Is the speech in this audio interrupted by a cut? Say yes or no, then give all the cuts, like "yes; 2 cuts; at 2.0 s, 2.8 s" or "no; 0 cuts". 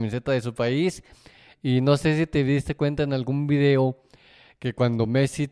no; 0 cuts